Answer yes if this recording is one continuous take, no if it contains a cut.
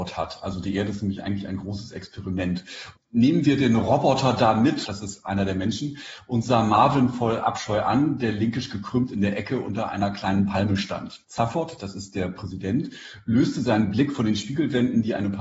no